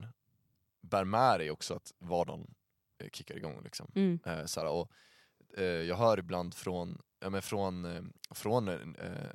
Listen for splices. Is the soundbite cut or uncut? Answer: uncut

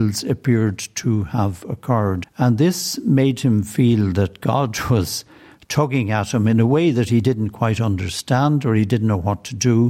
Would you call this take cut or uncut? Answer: cut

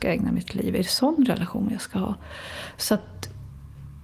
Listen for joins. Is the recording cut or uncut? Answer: uncut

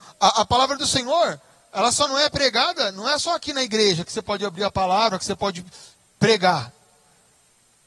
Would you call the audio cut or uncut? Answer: uncut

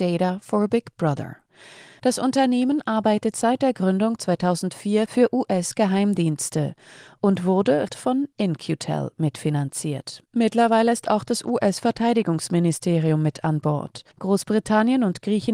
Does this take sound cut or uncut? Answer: cut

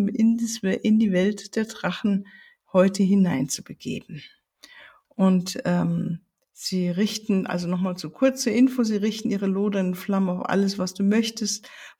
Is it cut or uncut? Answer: uncut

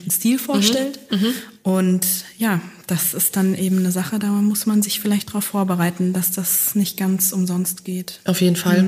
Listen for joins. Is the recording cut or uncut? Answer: uncut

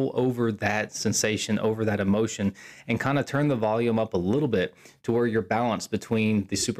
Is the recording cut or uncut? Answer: uncut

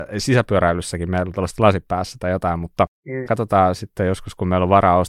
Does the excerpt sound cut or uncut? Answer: cut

